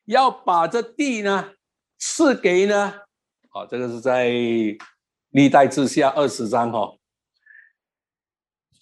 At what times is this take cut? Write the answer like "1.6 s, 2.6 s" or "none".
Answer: 3.3 s